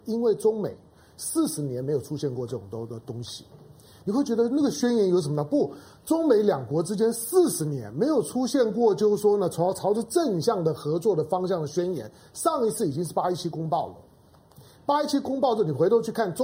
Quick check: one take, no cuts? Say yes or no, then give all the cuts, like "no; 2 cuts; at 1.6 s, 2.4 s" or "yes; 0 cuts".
yes; 0 cuts